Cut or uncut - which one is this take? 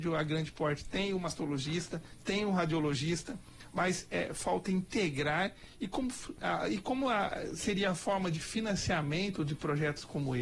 uncut